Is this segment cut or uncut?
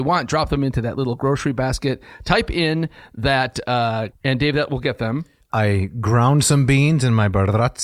cut